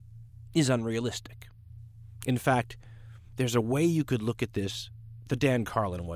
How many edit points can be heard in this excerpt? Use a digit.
0